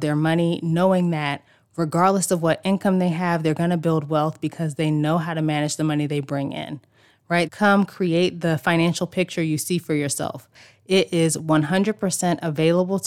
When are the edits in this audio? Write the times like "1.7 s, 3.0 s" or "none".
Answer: 7.5 s